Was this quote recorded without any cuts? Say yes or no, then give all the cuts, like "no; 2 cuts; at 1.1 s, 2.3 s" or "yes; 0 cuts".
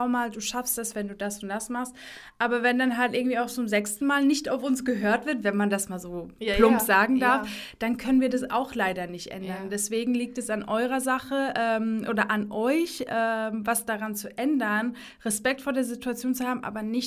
yes; 0 cuts